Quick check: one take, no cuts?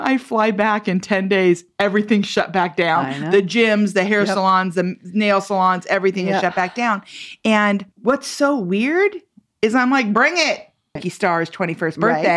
no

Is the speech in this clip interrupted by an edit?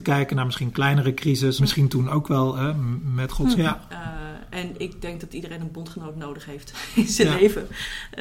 yes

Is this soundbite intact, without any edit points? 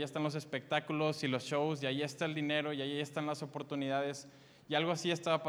yes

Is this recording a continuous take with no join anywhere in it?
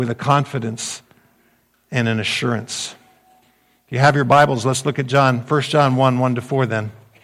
yes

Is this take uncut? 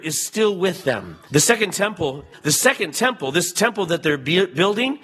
no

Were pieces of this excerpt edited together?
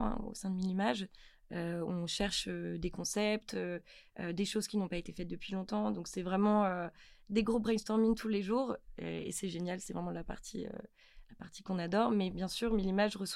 no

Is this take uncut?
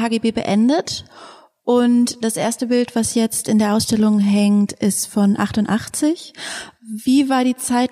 yes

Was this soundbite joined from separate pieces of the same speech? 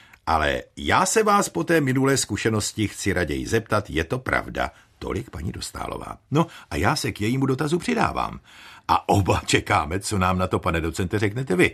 no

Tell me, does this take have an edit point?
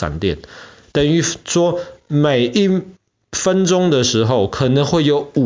no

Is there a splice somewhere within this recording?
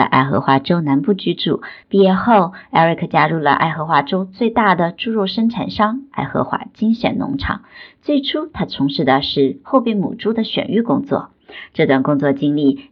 yes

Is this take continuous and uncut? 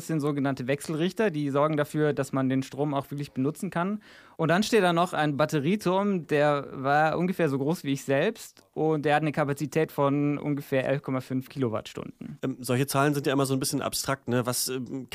yes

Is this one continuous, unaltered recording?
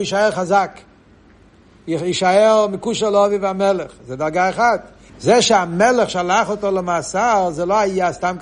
no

